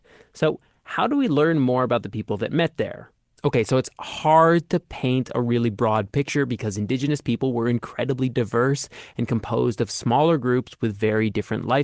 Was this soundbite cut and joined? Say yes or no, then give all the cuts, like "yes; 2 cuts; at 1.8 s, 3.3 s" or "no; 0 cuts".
yes; 1 cut; at 3.3 s